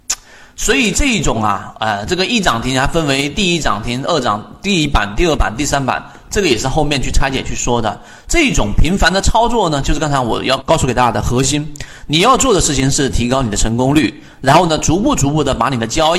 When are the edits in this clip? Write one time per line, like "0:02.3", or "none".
0:10.6